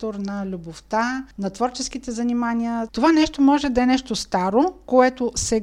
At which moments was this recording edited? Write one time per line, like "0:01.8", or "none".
0:02.9